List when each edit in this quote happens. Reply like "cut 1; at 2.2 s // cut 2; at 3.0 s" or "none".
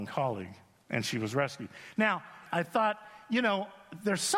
cut 1; at 2.5 s